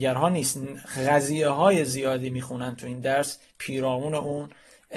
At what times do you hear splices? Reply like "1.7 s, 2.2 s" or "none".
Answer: none